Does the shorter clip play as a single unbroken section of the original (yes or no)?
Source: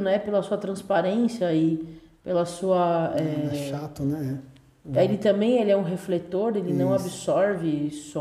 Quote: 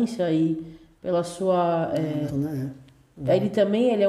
no